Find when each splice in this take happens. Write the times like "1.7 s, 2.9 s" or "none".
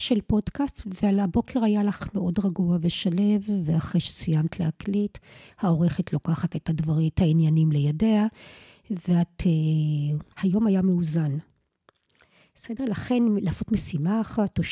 10.3 s